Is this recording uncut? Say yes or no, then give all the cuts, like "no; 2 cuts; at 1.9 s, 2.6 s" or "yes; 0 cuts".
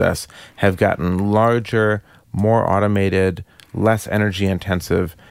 yes; 0 cuts